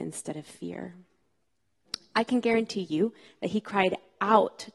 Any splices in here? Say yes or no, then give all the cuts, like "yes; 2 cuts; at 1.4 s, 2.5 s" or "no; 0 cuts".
no; 0 cuts